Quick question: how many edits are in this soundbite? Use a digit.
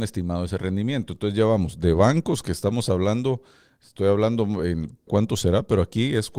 1